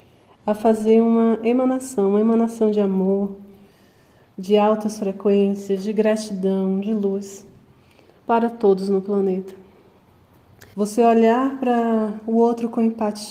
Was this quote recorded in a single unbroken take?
no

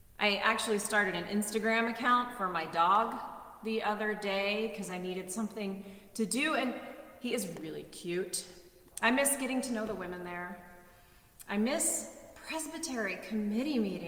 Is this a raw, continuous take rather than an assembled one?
no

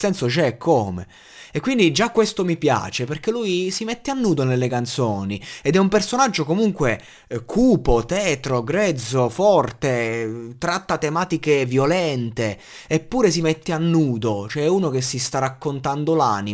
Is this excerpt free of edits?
yes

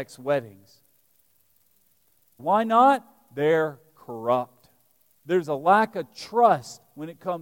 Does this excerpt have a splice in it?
yes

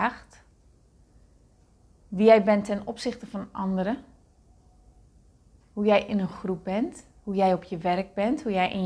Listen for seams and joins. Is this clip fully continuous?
yes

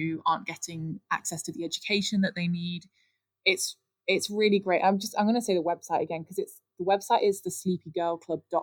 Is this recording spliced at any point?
no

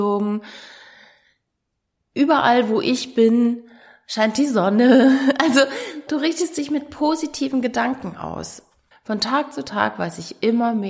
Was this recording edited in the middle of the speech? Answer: yes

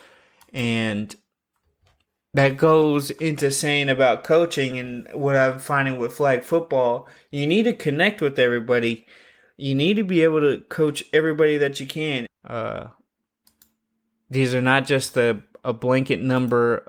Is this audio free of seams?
no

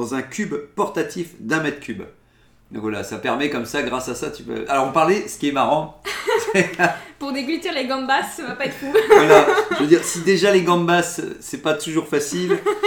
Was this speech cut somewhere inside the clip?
no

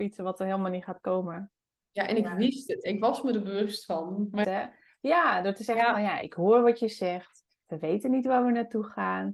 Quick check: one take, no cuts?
no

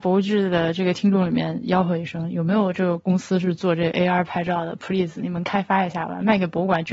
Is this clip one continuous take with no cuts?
yes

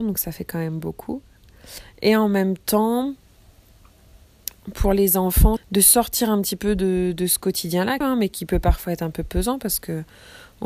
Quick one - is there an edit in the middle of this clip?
yes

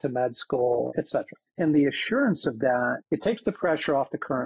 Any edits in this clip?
yes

